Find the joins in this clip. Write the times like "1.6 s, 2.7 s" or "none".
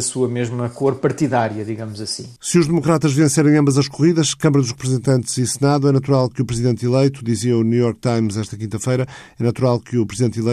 2.4 s